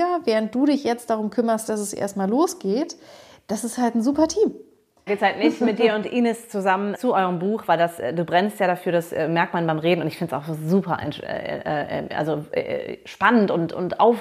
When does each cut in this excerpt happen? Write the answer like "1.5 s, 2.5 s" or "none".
5.1 s, 6.9 s